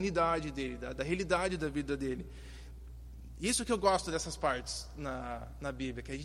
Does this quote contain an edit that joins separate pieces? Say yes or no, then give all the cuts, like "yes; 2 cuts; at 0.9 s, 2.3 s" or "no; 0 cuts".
no; 0 cuts